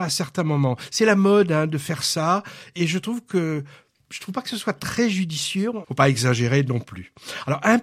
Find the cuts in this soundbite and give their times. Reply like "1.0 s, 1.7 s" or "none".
2.8 s, 5.8 s